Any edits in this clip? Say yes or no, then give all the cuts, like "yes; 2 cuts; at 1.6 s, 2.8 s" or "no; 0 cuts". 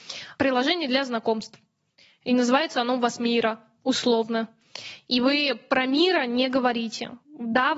no; 0 cuts